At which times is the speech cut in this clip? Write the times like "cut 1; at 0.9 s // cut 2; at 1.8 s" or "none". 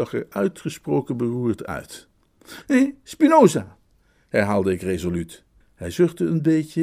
cut 1; at 2.6 s // cut 2; at 5.6 s